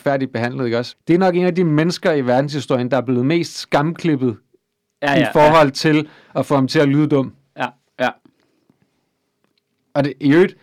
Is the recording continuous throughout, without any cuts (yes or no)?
no